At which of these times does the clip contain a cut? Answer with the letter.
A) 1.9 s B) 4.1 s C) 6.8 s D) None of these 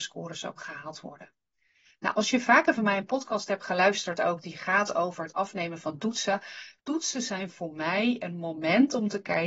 C